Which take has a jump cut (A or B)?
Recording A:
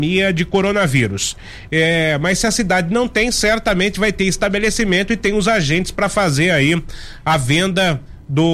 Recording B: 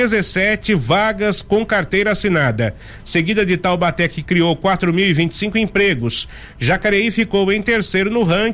A